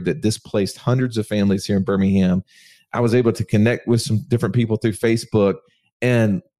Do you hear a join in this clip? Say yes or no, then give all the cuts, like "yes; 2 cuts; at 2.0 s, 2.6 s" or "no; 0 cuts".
no; 0 cuts